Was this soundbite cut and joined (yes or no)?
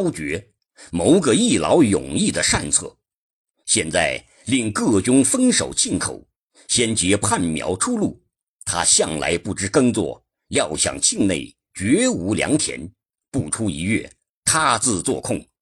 no